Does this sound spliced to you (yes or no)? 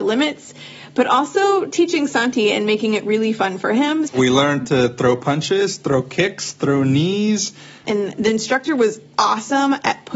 yes